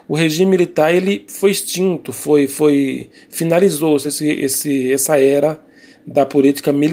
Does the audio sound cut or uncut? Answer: uncut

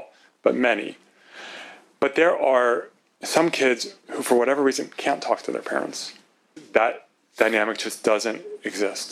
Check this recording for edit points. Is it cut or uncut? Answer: uncut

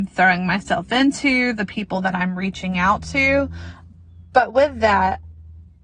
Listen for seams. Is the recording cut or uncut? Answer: uncut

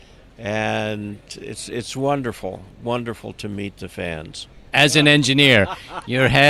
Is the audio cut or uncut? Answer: cut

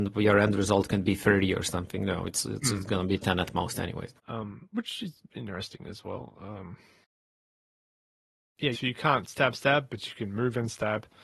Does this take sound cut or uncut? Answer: cut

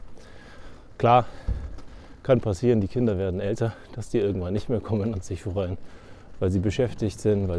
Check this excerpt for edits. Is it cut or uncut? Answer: uncut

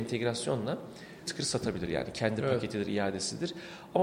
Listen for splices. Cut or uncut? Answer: cut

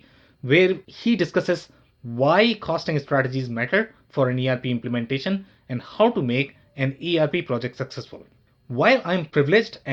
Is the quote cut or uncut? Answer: uncut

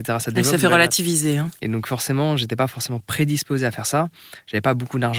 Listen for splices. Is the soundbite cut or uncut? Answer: cut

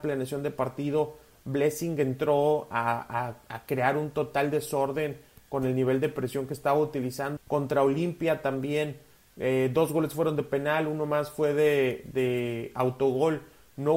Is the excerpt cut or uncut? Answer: cut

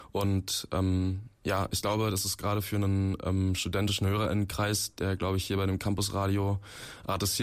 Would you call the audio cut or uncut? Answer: uncut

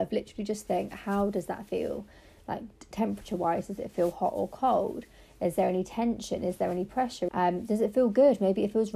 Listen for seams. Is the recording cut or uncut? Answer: cut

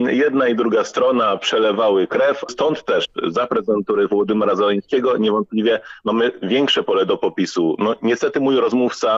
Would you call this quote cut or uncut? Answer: cut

